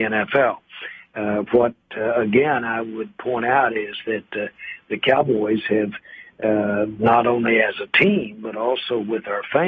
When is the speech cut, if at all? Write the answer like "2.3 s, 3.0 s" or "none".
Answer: none